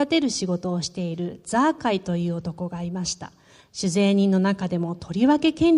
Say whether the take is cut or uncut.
uncut